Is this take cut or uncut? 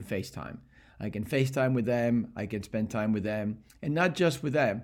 uncut